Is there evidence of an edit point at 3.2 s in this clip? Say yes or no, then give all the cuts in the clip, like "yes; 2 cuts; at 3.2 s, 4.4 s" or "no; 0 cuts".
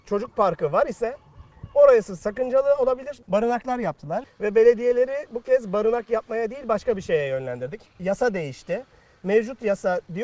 yes; 2 cuts; at 3.2 s, 4.2 s